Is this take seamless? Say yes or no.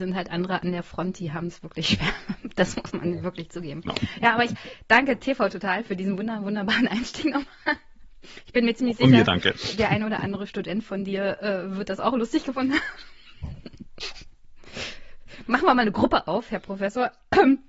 yes